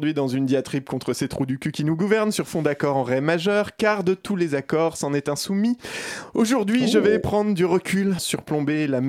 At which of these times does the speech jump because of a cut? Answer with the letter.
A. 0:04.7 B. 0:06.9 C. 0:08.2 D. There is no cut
C